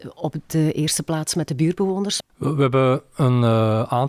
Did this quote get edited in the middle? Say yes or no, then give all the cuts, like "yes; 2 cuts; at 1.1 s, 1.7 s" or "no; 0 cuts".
yes; 1 cut; at 2.2 s